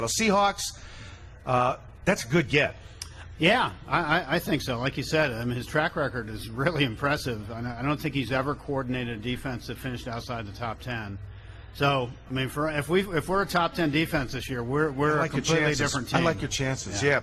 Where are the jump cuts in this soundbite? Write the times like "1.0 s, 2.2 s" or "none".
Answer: none